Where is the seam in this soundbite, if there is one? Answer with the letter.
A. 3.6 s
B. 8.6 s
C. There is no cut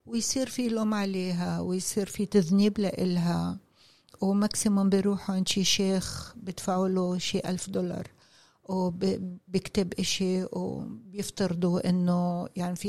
C